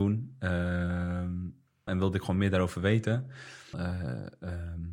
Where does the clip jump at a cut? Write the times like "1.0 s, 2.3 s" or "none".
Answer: 1.9 s, 3.7 s